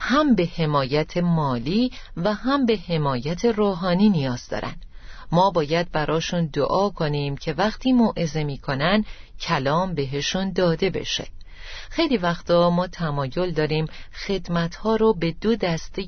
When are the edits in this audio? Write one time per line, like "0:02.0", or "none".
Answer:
none